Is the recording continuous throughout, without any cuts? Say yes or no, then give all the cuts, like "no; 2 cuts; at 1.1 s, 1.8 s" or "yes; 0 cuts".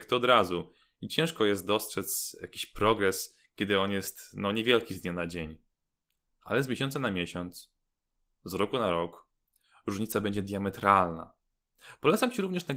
yes; 0 cuts